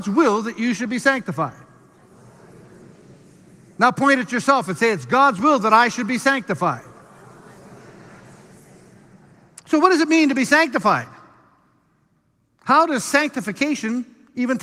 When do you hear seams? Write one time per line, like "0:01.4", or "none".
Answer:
none